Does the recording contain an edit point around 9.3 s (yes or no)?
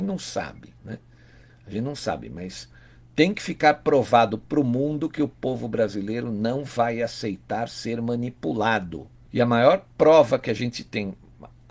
yes